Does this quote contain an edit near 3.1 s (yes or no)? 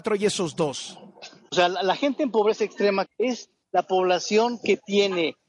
yes